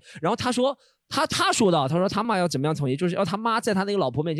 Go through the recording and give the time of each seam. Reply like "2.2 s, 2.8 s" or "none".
2.2 s

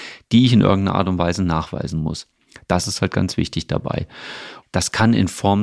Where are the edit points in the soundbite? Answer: 4.6 s

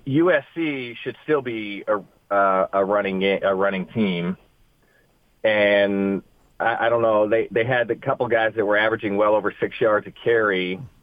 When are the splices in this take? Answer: none

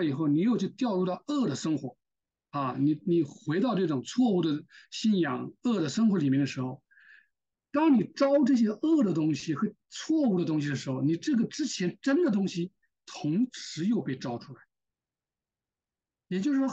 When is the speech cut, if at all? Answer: none

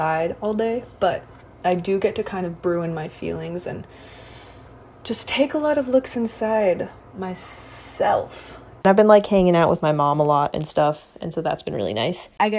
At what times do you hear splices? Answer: 8.8 s

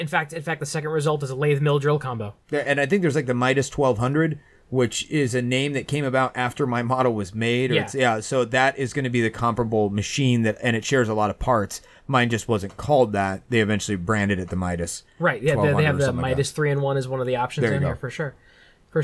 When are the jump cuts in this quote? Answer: none

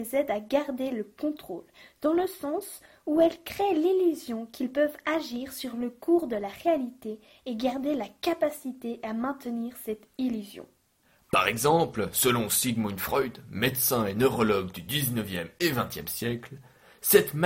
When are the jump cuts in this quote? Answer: 11.2 s

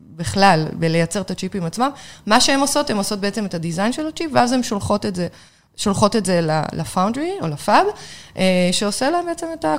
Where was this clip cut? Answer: none

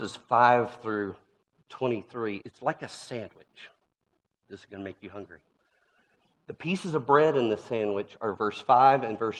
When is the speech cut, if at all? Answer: 2.4 s

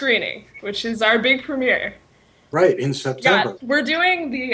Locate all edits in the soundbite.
3.6 s

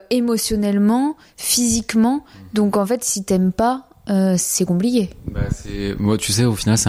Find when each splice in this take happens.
none

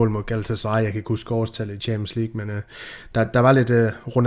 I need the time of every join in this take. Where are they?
none

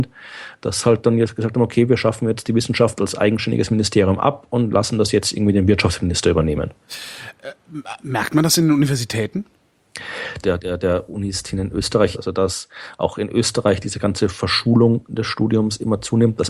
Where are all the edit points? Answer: 10.4 s, 12.1 s

